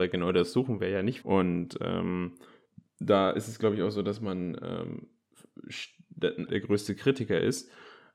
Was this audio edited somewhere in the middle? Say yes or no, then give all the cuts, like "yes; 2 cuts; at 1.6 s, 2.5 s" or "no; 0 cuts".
yes; 2 cuts; at 1.2 s, 6.5 s